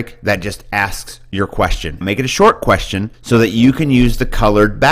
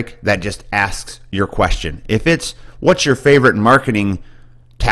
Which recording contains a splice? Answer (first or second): first